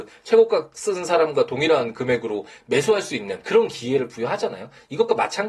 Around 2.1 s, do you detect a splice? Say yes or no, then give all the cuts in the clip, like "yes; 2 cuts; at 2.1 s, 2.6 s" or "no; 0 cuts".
no; 1 cut; at 3.4 s